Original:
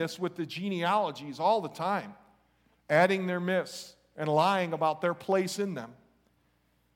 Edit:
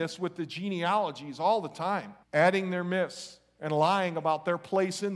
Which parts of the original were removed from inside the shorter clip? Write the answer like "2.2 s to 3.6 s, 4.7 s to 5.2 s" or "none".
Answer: 2.2 s to 2.8 s